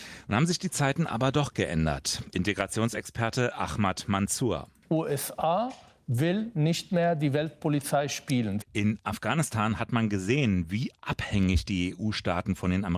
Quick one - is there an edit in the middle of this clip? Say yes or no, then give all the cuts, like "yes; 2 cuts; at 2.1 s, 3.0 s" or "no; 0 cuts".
yes; 1 cut; at 8.6 s